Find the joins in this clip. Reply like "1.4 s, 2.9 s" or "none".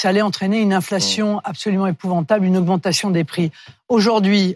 none